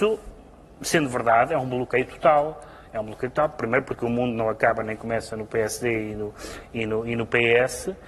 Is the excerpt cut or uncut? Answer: uncut